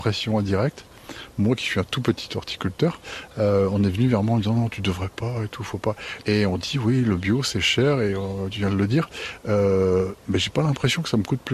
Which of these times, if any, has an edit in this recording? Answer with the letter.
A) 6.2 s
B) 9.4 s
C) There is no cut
A